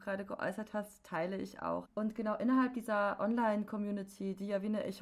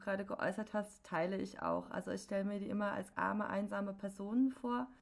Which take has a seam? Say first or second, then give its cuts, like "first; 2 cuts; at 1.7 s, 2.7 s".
first; 1 cut; at 1.9 s